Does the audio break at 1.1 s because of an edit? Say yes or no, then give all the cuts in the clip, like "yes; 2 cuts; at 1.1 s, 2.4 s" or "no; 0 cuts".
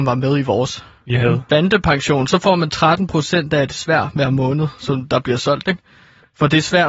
yes; 1 cut; at 1.1 s